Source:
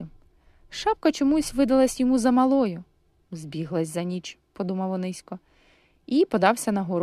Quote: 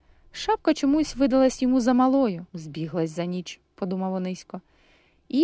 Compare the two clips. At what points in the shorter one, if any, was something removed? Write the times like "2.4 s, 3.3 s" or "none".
2.5 s